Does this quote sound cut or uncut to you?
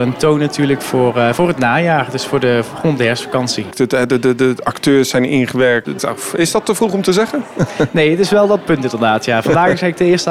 cut